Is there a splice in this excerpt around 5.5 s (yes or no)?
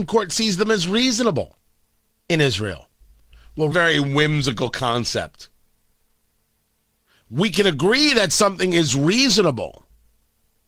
no